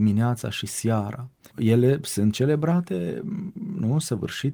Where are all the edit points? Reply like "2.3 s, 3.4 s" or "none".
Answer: 1.5 s